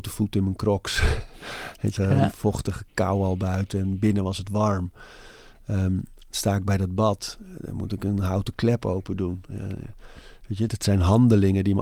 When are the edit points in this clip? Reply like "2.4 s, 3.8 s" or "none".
2.0 s, 10.7 s